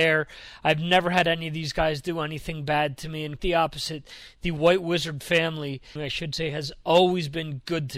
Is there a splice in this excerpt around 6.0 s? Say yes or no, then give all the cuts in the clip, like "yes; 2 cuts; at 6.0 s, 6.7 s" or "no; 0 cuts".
yes; 2 cuts; at 3.4 s, 6.0 s